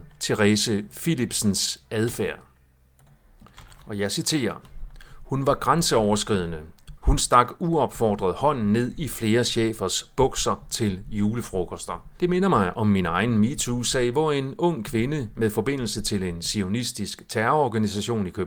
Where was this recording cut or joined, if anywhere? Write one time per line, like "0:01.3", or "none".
0:07.0
0:12.2